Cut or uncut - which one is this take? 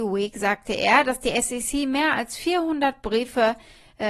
uncut